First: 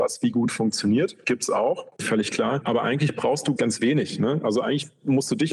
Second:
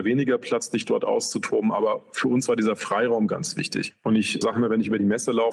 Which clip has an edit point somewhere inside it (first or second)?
first